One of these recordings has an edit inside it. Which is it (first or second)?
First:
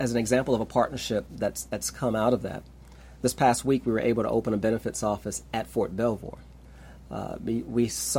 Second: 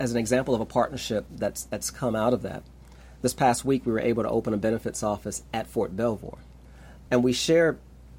second